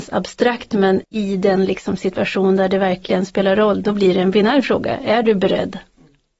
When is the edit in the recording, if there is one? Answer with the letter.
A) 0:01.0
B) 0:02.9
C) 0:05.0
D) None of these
A